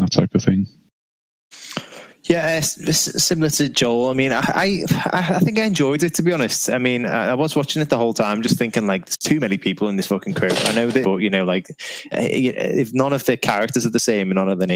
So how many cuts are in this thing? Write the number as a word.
two